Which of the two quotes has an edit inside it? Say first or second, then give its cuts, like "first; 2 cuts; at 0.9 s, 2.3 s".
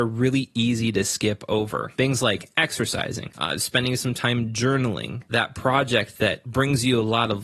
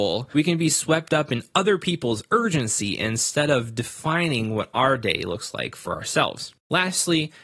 first; 1 cut; at 3.3 s